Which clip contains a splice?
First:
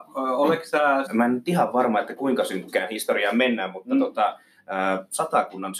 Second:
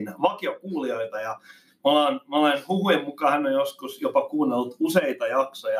first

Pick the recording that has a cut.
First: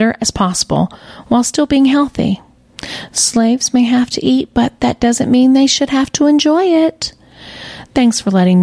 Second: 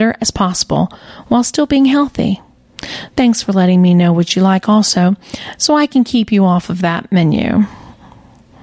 second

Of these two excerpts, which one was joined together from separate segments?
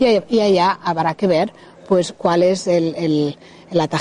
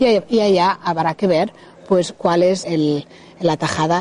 second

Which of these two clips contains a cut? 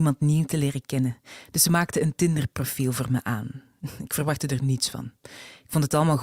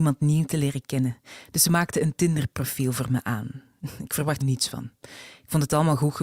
second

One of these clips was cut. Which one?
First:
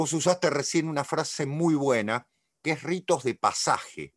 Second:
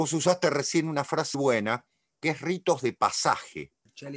second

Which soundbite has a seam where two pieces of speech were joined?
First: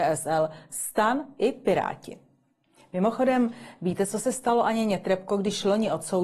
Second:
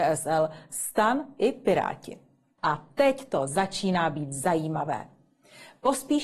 second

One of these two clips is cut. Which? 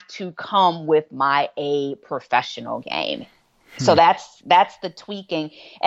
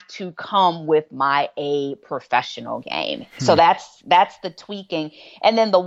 second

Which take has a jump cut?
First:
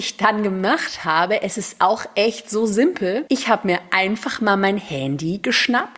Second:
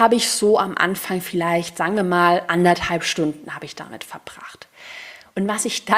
first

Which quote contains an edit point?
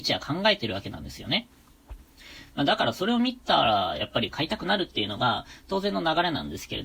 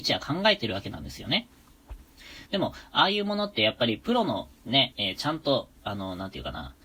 second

